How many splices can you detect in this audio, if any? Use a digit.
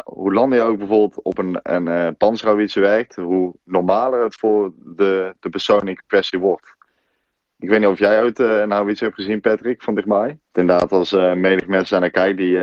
1